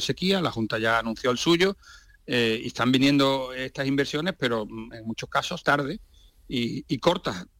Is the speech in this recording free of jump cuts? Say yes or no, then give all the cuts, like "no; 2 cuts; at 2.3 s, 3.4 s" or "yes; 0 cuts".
yes; 0 cuts